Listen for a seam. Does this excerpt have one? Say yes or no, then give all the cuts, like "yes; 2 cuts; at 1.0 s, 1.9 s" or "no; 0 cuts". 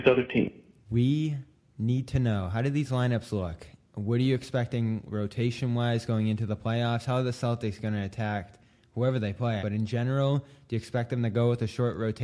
yes; 1 cut; at 9.6 s